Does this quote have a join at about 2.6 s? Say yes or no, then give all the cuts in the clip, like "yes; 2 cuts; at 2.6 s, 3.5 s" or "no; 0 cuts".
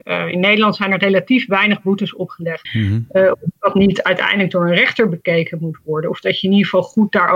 yes; 1 cut; at 2.6 s